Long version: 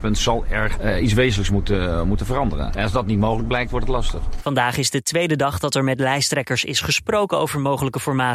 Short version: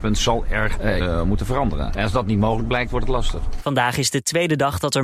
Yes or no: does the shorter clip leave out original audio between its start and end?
yes